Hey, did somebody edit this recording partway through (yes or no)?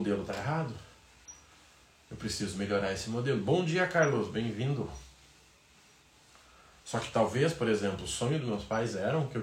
no